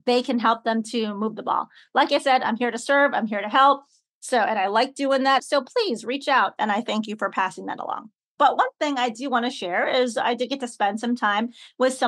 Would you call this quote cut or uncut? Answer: cut